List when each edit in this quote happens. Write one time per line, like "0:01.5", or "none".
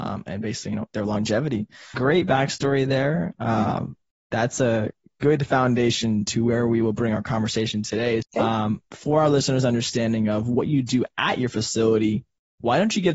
0:01.9
0:08.2